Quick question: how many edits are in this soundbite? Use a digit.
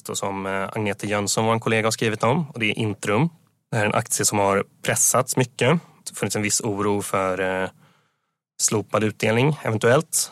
0